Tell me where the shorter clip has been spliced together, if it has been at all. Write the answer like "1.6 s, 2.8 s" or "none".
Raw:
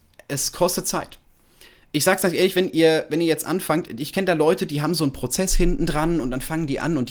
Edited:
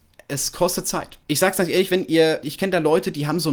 1.2 s, 2.4 s